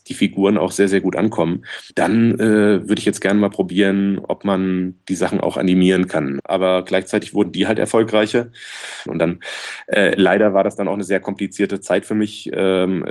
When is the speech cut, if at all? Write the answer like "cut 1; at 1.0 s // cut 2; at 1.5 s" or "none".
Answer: cut 1; at 1.9 s // cut 2; at 6.4 s // cut 3; at 9.1 s

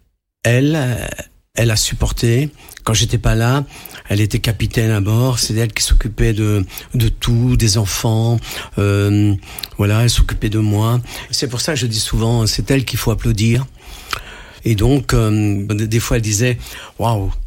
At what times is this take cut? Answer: cut 1; at 11.3 s // cut 2; at 14.6 s // cut 3; at 15.7 s

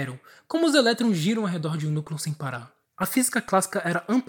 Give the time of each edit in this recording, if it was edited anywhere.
cut 1; at 2.9 s

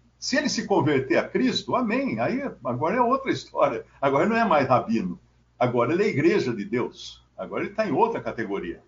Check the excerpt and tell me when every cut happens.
cut 1; at 5.4 s // cut 2; at 7.3 s

